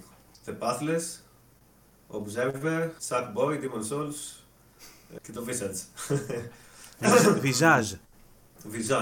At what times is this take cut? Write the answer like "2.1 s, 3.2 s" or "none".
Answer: 3.0 s, 5.2 s